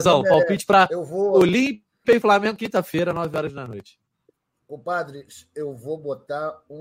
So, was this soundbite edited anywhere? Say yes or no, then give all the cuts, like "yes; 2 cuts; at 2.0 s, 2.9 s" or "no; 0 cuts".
no; 0 cuts